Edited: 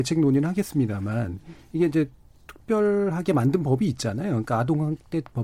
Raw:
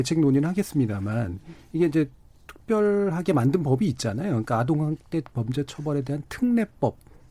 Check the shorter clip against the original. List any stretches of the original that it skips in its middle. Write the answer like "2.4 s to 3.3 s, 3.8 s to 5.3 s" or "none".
none